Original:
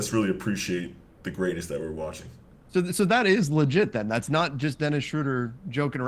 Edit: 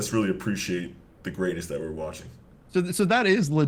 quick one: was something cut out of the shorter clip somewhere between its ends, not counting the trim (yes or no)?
no